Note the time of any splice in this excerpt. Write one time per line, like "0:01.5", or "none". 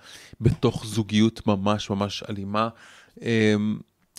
none